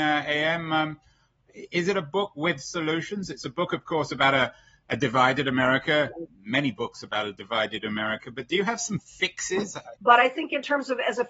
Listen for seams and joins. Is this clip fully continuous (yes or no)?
no